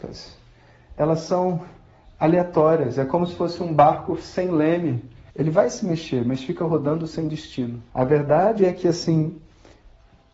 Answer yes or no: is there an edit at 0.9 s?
no